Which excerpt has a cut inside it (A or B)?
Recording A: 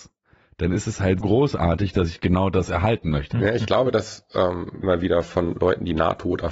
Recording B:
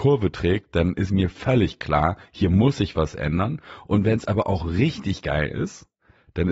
A